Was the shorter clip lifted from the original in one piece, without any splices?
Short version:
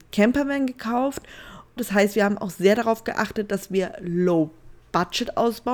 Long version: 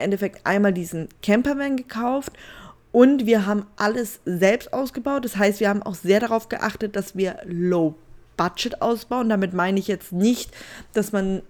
no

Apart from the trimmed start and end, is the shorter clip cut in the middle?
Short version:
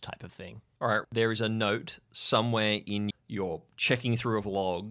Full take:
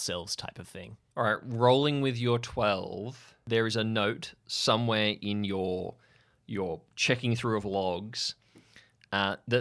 yes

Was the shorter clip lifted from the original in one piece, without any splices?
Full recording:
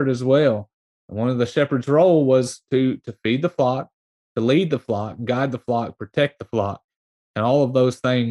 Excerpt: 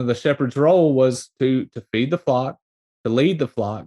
yes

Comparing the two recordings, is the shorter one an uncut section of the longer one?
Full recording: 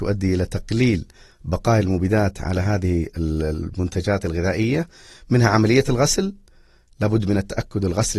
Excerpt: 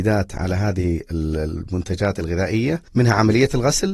no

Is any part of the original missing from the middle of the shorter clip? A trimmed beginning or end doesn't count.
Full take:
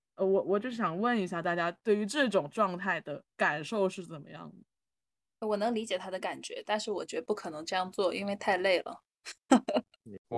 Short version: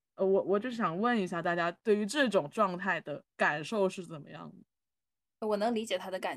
no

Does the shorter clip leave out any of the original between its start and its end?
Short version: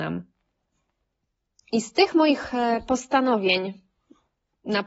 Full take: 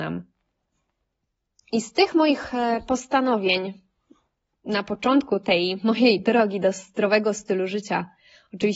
no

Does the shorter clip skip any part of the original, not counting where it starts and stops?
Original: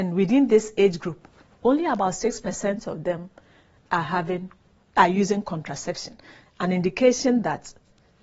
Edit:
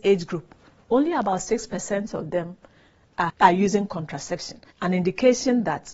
yes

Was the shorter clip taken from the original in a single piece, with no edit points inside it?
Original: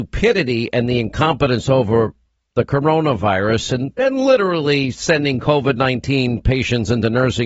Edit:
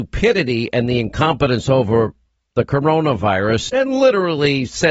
no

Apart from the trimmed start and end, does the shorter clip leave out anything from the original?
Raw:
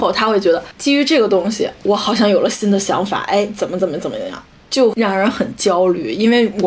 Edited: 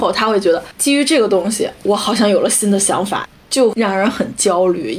yes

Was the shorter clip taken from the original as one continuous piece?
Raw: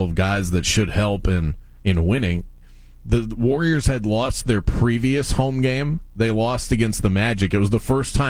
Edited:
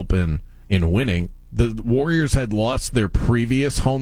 no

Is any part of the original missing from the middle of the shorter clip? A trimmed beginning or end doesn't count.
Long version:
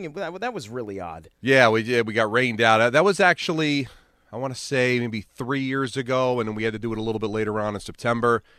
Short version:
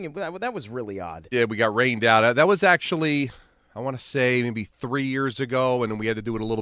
yes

